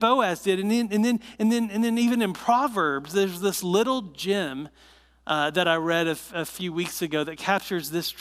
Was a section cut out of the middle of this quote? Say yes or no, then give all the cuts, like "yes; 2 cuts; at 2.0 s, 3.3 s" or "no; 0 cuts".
no; 0 cuts